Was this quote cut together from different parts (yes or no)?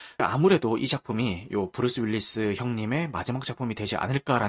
no